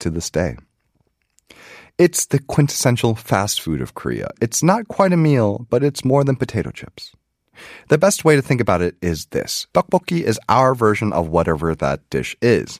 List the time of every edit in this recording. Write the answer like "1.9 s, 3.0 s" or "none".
9.7 s